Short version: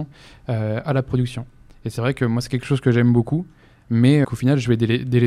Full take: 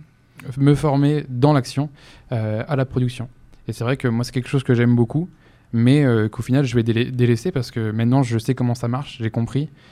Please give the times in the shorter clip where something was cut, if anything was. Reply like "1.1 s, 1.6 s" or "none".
4.2 s